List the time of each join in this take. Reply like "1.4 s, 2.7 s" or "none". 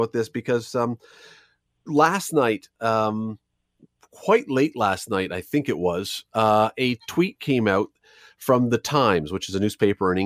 none